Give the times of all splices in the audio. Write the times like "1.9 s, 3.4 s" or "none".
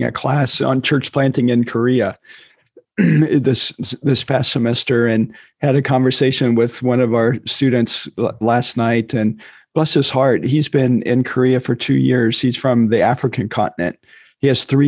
8.4 s